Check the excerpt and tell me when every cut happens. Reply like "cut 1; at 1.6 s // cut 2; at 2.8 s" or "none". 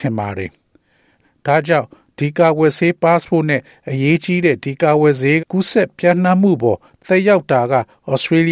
cut 1; at 5.4 s